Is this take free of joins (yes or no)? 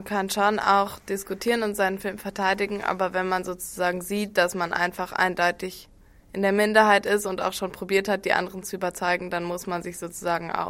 yes